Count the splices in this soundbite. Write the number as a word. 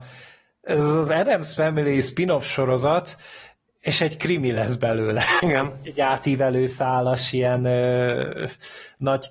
one